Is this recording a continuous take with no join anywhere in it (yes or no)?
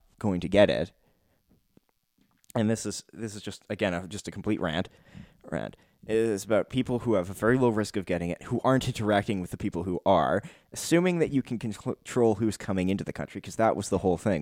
yes